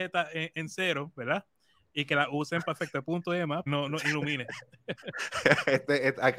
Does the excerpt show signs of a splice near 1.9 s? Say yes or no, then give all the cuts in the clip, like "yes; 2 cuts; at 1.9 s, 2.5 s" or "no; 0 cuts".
no; 1 cut; at 3.7 s